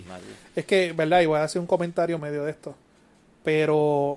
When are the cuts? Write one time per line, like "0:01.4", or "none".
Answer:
0:02.2